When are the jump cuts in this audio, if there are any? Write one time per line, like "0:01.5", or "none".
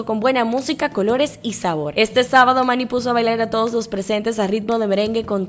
none